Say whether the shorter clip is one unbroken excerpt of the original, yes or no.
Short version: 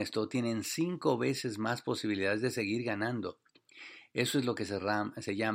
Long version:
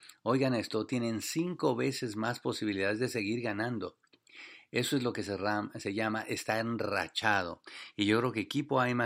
yes